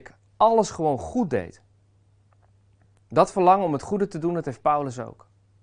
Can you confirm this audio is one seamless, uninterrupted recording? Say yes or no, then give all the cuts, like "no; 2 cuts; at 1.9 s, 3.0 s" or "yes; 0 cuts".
yes; 0 cuts